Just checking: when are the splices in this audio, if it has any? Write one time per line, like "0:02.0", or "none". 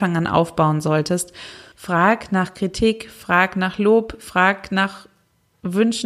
0:01.7